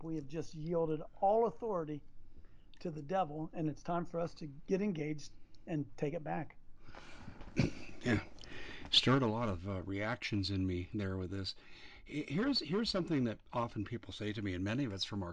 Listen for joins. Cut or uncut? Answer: uncut